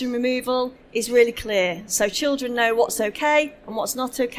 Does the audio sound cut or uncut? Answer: uncut